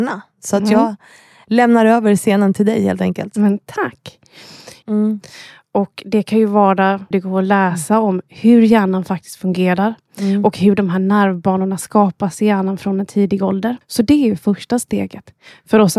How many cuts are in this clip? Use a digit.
3